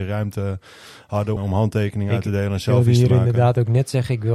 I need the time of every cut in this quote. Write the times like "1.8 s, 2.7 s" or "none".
1.4 s